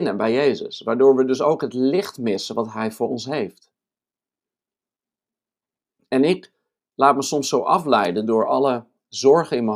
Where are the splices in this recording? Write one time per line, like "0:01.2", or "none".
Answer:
none